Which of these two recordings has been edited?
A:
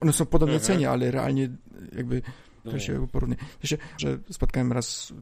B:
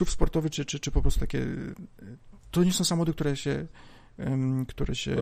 A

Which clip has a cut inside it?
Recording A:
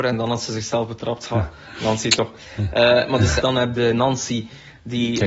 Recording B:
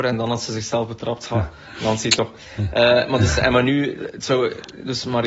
A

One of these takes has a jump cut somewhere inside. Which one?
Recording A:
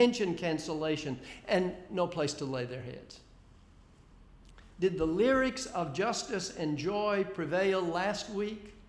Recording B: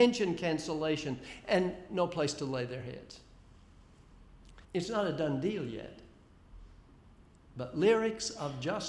B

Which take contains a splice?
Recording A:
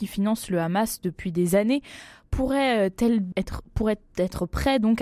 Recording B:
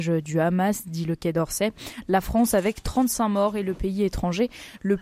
A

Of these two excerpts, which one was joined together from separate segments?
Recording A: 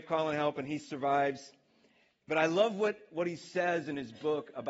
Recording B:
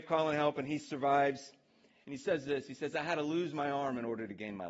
B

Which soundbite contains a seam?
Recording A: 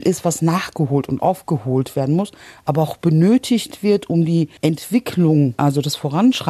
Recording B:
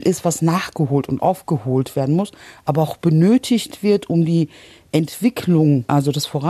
A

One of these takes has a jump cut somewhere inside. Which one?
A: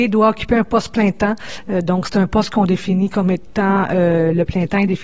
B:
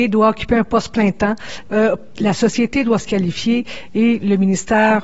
B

